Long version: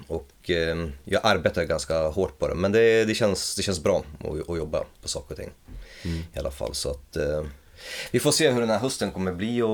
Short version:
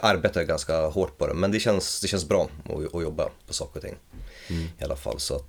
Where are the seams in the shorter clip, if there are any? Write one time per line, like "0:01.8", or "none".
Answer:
0:01.5